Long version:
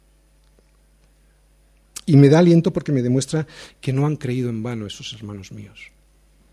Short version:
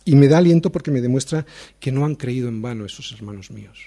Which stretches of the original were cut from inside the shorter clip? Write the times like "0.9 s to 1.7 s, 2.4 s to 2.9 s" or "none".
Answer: none